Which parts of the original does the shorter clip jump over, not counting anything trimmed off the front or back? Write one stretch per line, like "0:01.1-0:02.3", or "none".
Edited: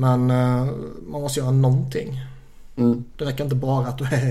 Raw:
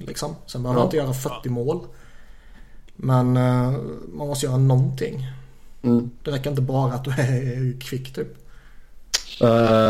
none